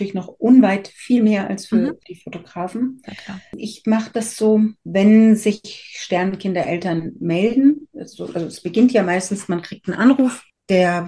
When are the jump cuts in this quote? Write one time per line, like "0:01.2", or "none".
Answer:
0:04.8

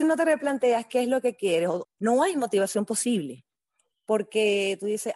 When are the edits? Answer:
0:01.8

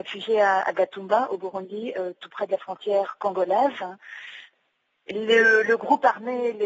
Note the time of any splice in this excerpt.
none

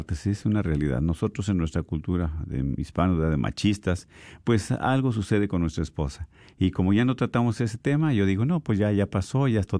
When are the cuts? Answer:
none

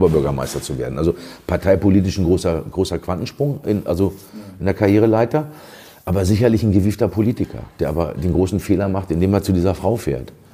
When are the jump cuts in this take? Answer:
none

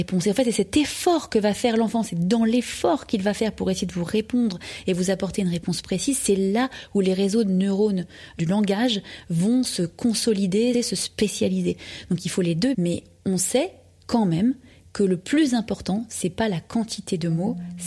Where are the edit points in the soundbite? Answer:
0:10.7
0:12.7

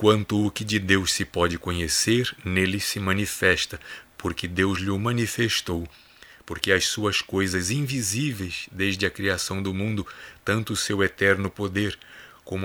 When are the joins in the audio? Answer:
none

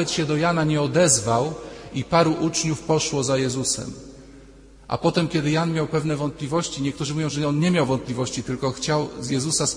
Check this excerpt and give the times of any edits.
none

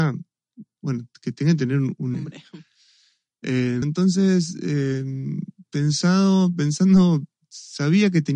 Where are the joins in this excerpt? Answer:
0:02.1
0:03.8

